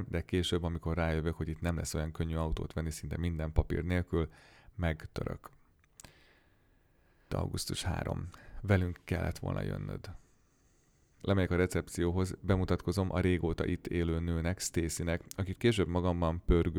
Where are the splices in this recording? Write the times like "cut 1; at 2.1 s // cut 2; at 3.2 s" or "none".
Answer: cut 1; at 7.3 s // cut 2; at 11.2 s